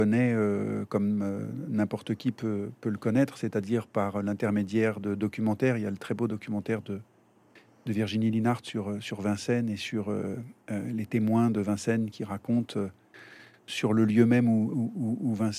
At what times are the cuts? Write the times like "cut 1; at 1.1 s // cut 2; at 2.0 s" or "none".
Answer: none